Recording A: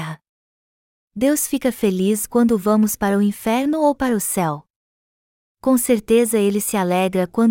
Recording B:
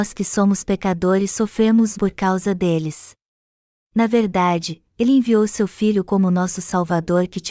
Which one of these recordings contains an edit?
B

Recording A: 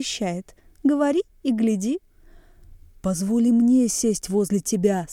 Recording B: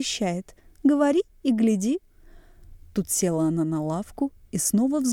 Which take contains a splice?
A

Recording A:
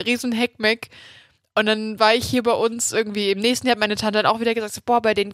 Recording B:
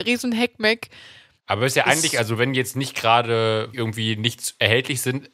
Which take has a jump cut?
B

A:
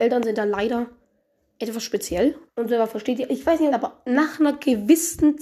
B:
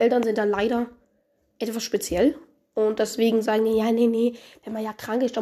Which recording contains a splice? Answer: A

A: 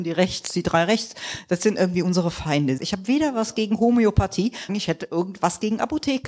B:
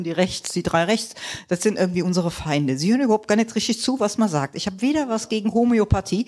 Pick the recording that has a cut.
A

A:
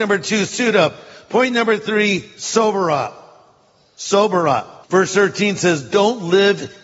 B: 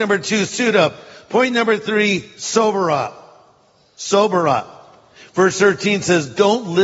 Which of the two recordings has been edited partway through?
A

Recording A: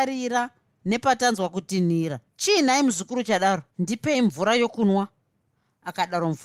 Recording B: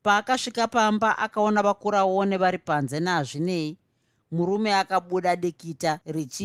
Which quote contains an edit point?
A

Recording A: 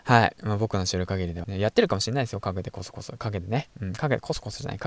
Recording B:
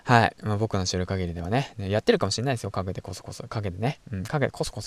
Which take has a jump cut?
A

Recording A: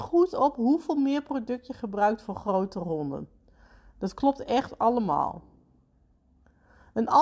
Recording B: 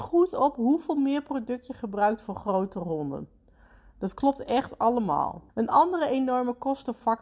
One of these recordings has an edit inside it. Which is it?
B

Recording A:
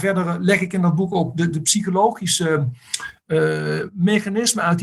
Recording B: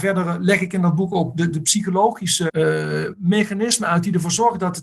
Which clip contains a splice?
B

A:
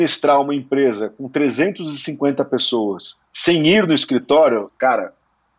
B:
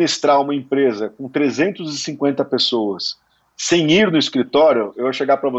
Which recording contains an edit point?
A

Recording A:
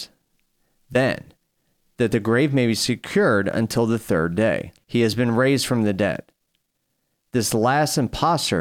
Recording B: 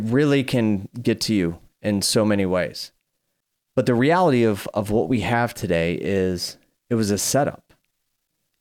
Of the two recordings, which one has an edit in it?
A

